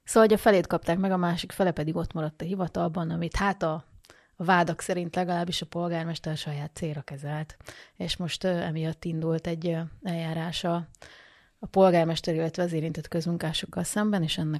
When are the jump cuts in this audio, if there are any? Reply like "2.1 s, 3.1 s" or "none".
none